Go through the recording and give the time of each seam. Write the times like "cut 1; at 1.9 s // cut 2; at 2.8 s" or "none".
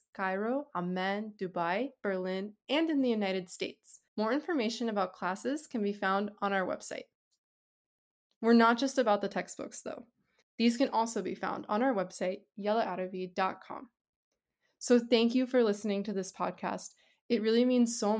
cut 1; at 4.1 s // cut 2; at 10.4 s